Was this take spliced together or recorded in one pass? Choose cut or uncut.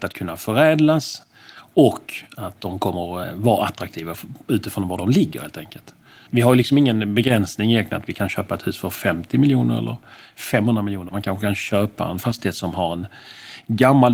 cut